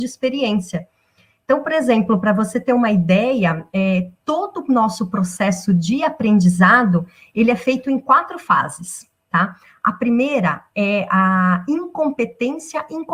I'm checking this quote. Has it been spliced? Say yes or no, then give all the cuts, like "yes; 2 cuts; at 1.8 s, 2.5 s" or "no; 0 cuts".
no; 0 cuts